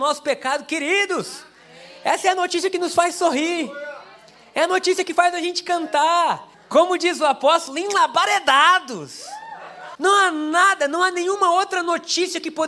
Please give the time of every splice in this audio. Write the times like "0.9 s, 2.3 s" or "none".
6.5 s, 9.9 s